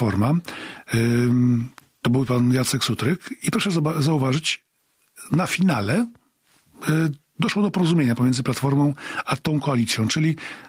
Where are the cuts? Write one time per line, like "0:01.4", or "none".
none